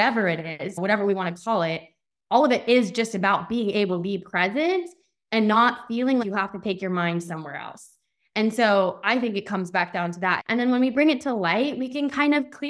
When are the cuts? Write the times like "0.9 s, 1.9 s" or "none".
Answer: 6.2 s, 10.4 s